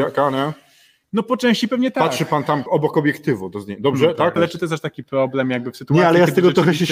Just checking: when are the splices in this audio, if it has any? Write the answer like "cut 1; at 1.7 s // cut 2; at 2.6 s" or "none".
cut 1; at 2.7 s // cut 2; at 4.4 s